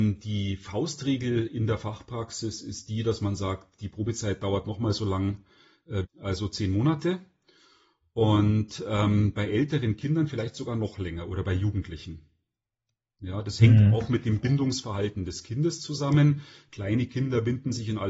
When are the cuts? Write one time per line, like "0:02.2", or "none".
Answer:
0:06.0